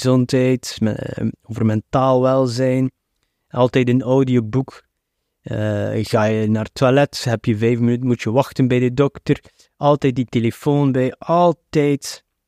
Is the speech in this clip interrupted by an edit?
no; 0 cuts

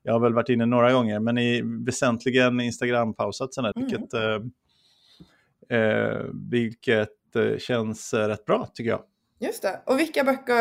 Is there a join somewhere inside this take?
yes; 1 cut; at 3.7 s

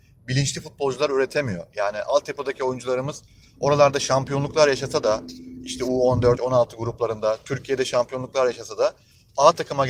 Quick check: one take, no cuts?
no; 1 cut; at 6.4 s

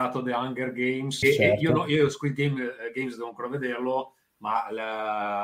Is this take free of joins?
no; 1 cut; at 1.2 s

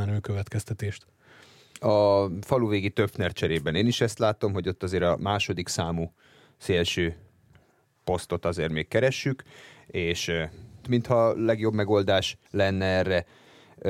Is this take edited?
yes; 2 cuts; at 10.8 s, 12.5 s

